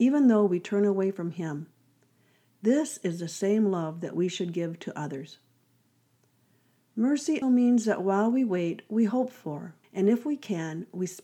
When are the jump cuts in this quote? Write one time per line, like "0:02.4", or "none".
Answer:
0:07.4
0:09.8